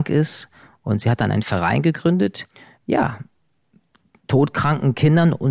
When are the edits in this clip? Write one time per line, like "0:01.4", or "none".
0:02.8